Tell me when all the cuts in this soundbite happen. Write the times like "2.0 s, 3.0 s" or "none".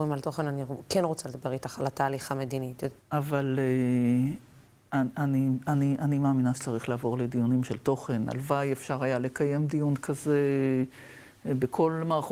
3.0 s